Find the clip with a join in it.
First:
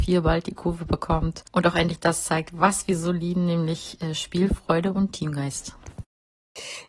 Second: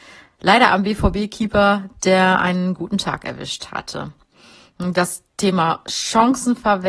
first; 1 cut; at 1.5 s

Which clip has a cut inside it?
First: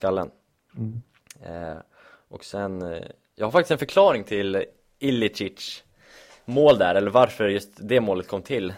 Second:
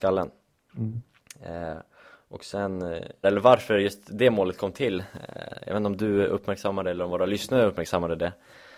second; 1 cut; at 3.2 s

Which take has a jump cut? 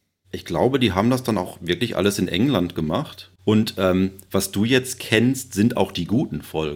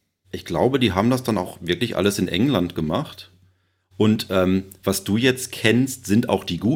first; 1 cut; at 3.4 s

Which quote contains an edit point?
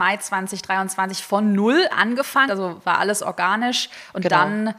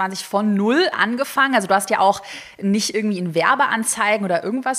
first; 1 cut; at 2.5 s

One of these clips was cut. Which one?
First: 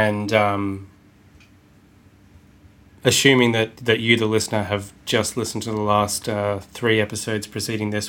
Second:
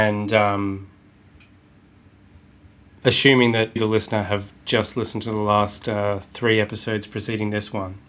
second; 1 cut; at 3.8 s

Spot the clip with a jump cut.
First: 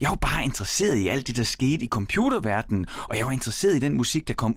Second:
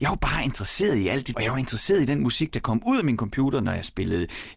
second; 1 cut; at 1.3 s

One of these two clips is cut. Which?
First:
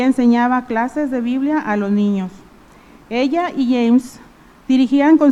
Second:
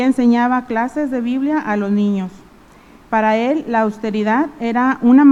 second; 1 cut; at 3.0 s

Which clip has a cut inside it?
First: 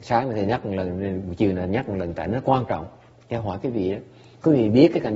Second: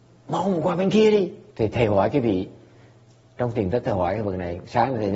second; 1 cut; at 1.5 s

